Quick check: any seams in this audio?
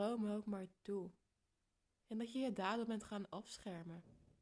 yes; 1 cut; at 1.9 s

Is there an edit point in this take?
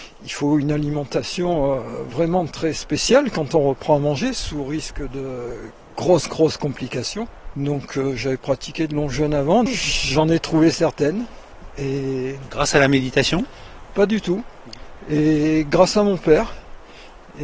yes; 2 cuts; at 7.5 s, 9.7 s

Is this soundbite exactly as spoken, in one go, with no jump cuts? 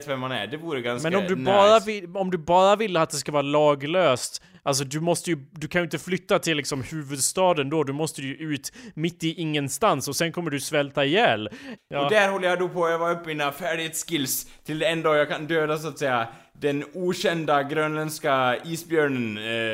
no; 1 cut; at 11.8 s

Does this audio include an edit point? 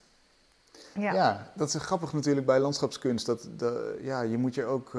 no; 0 cuts

